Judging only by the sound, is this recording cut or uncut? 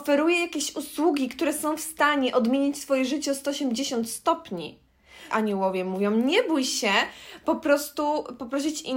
cut